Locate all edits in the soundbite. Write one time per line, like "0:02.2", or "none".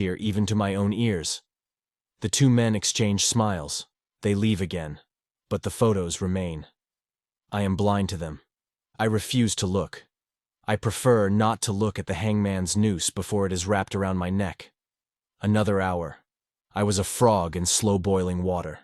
none